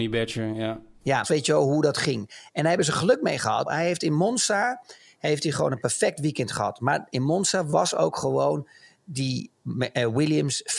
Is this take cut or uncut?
cut